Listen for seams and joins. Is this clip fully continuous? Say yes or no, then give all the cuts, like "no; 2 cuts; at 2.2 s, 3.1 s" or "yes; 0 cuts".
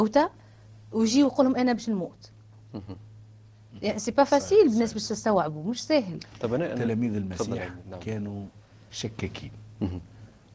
yes; 0 cuts